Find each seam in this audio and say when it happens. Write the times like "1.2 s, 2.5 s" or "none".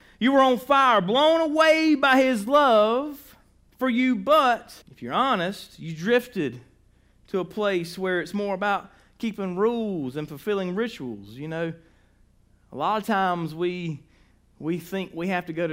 4.8 s